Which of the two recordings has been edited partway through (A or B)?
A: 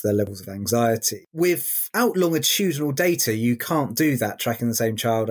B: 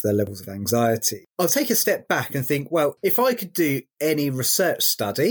B